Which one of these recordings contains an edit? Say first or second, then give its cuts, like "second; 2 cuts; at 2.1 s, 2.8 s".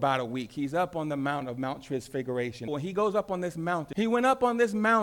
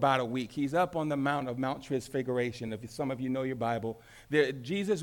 first; 2 cuts; at 2.7 s, 3.9 s